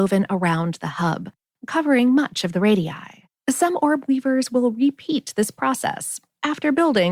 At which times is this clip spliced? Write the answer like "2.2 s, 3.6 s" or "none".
3.4 s